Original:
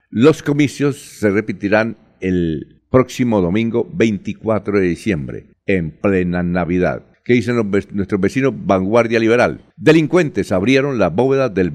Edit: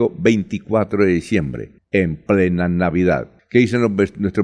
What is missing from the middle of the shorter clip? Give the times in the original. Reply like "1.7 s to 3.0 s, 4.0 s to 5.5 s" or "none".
none